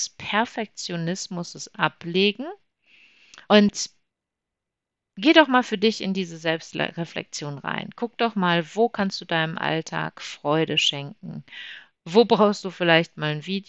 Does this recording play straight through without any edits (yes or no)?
no